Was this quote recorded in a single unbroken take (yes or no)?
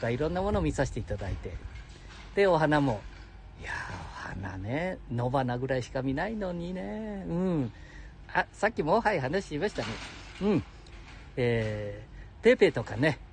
no